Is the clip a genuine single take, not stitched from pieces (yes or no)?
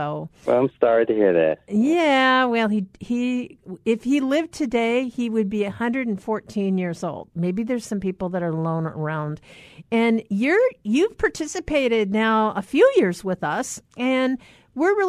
no